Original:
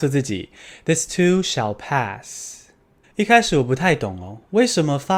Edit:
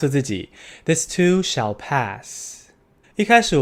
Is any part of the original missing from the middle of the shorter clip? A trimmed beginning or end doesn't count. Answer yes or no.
no